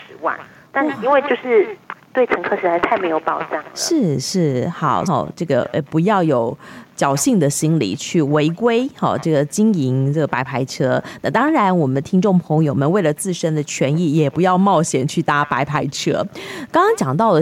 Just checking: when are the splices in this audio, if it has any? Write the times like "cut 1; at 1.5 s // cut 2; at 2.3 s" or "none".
cut 1; at 5.1 s